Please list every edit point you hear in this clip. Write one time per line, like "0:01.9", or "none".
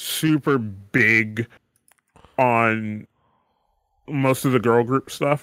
none